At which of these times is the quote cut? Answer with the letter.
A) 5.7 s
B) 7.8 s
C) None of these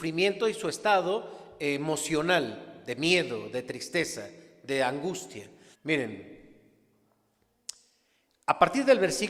A